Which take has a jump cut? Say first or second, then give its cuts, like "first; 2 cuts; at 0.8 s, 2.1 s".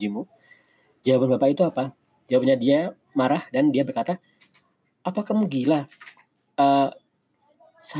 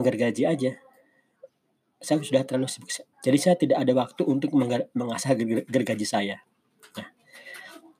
second; 1 cut; at 3.1 s